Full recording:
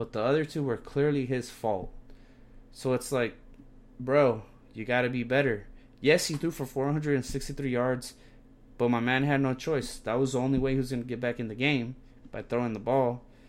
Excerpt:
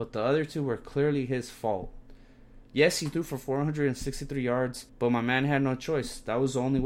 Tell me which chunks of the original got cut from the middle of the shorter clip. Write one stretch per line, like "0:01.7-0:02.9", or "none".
0:02.6-0:05.9
0:08.2-0:08.7